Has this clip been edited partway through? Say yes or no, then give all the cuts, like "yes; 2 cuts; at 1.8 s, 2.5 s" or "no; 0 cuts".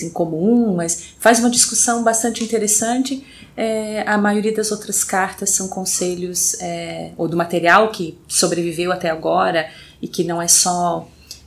no; 0 cuts